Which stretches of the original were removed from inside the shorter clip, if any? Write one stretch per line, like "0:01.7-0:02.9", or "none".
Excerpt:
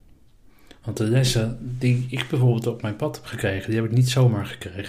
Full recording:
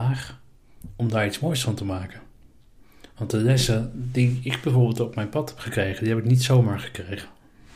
none

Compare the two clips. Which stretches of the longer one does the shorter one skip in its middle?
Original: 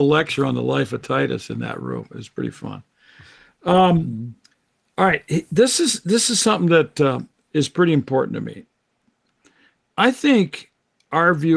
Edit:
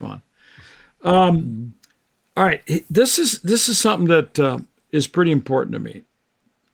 none

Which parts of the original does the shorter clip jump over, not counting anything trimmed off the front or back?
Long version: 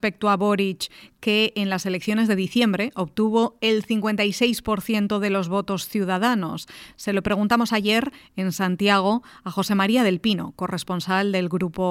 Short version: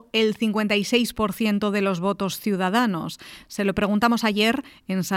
none

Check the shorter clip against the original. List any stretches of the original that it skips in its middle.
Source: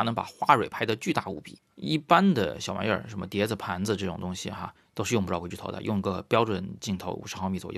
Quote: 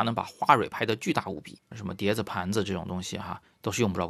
0:01.7-0:03.0

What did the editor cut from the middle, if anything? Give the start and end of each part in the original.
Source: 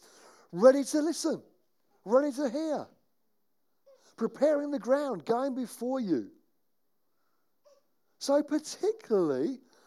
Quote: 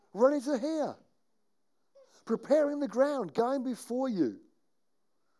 none

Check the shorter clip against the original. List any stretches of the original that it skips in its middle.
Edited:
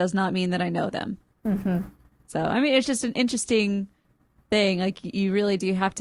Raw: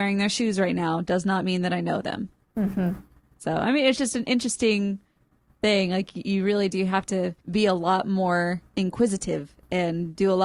none

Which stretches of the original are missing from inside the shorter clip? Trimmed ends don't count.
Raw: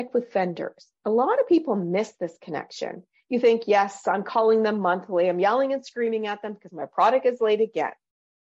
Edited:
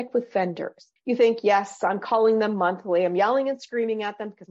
0:01.0-0:03.2

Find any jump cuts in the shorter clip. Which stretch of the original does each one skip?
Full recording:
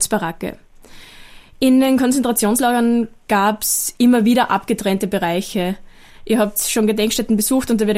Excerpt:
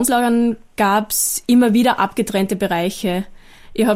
none

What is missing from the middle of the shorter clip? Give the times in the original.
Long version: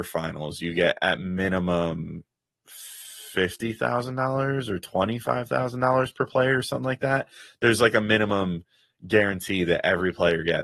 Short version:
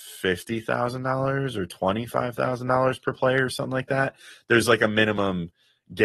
none

